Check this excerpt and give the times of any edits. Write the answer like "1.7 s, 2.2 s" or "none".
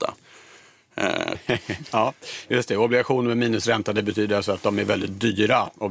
1.3 s